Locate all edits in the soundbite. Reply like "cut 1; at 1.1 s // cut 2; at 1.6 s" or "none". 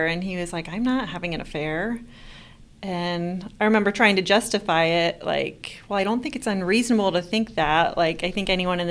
none